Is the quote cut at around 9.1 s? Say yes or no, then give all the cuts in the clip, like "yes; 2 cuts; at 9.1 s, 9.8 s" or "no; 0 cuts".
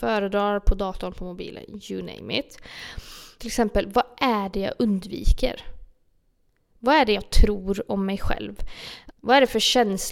yes; 2 cuts; at 3.4 s, 9.1 s